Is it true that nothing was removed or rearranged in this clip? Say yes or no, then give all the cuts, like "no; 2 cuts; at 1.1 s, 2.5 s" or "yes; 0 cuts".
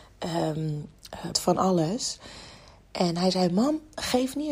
no; 1 cut; at 1.3 s